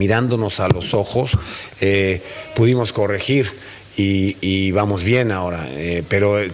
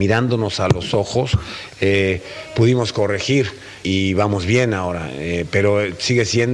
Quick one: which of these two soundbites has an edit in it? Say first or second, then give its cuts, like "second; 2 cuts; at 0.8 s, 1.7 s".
second; 1 cut; at 3.8 s